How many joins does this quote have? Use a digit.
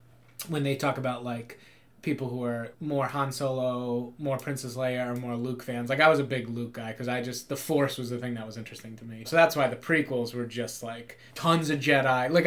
3